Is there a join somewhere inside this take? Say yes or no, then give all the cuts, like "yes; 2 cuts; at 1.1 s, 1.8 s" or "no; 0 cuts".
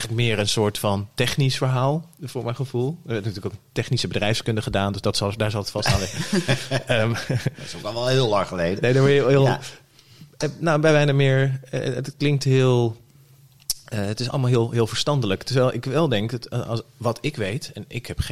no; 0 cuts